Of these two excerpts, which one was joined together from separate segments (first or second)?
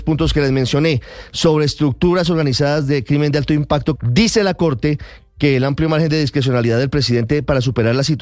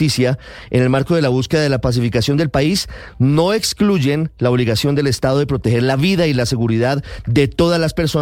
first